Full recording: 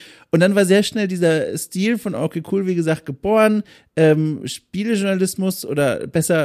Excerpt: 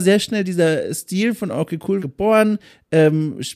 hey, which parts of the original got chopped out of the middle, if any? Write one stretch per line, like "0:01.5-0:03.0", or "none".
0:02.6-0:03.0